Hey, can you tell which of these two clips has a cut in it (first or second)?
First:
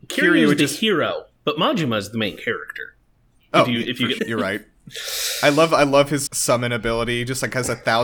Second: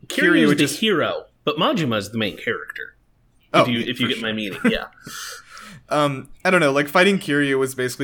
first